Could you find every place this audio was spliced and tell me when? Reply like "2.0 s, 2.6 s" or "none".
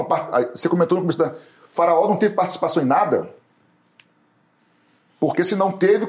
none